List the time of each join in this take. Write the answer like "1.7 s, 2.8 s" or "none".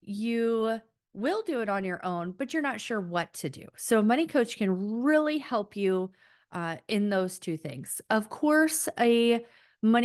none